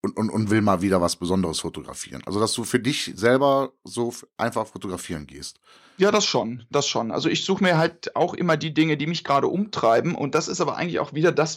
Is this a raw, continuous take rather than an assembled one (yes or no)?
yes